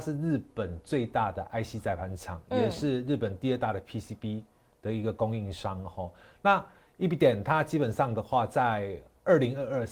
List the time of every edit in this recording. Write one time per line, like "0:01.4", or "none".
none

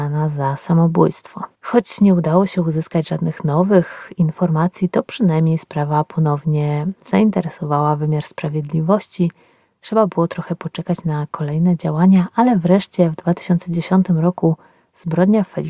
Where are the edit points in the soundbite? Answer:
0:01.5

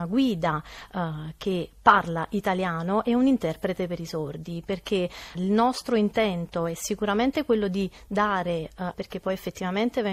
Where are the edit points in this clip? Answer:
0:05.3
0:08.9

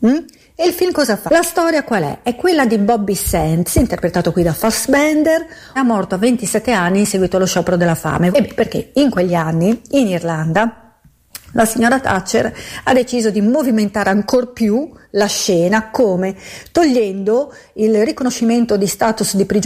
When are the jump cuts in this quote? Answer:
0:01.3
0:05.8
0:08.3

